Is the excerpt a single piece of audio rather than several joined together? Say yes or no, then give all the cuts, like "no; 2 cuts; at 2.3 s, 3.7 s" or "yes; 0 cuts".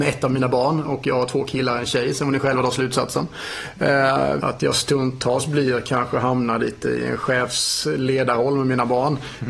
no; 1 cut; at 4.4 s